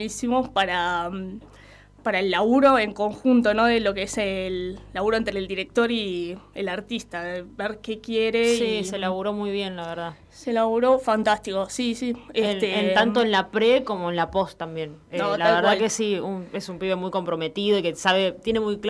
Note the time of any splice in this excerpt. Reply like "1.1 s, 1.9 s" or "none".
none